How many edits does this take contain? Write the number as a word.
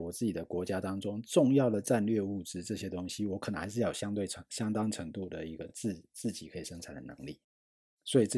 zero